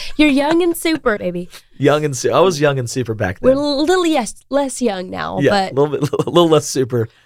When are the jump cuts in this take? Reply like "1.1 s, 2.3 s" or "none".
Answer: 1.2 s